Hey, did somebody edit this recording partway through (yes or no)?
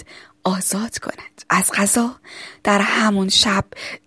yes